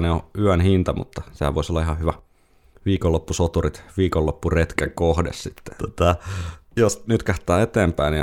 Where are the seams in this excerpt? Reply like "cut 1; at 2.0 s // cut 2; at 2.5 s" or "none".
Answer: cut 1; at 5.8 s // cut 2; at 7.1 s